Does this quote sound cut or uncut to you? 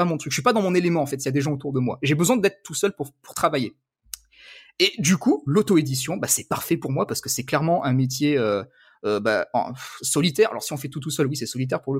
uncut